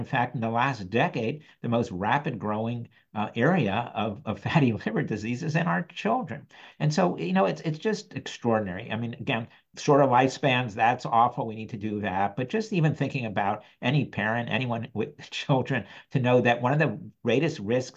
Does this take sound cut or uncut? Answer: uncut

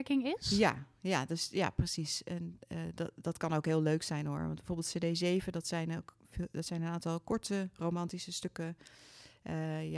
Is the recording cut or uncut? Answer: uncut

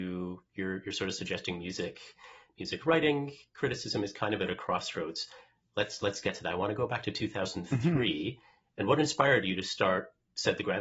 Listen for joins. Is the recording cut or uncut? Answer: uncut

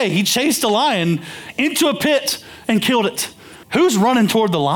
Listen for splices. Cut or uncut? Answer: cut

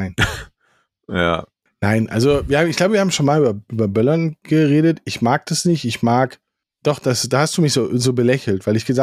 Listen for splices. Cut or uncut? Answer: uncut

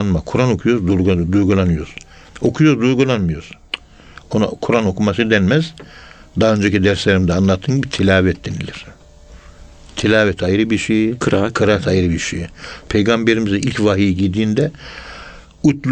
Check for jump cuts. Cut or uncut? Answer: uncut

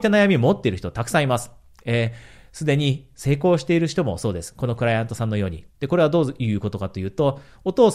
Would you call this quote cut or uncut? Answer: cut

